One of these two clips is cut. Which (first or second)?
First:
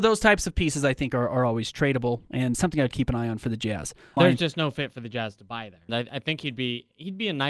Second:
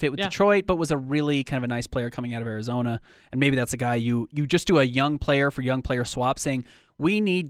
first